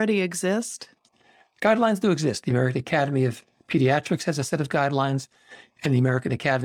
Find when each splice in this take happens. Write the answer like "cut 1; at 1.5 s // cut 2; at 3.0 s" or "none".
none